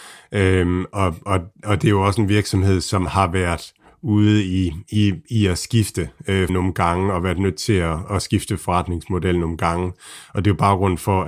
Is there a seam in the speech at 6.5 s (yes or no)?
yes